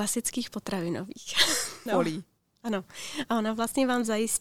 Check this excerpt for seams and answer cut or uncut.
cut